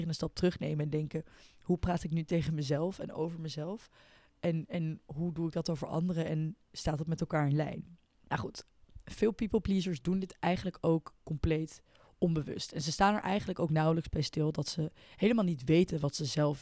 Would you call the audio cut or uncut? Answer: uncut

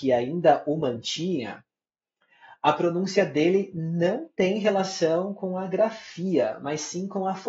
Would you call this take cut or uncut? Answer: uncut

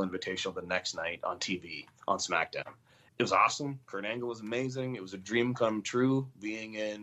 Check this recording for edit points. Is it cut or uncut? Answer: cut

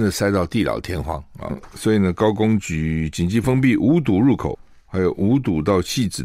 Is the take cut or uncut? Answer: uncut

